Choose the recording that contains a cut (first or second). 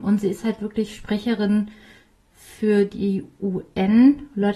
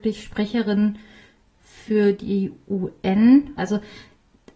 second